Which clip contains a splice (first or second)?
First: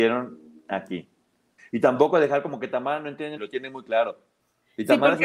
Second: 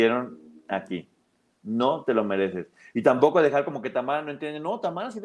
first